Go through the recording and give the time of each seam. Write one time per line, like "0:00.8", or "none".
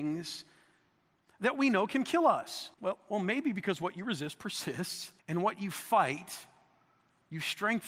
0:02.7
0:05.2